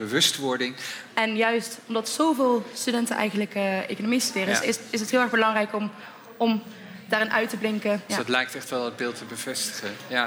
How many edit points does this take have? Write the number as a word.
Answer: two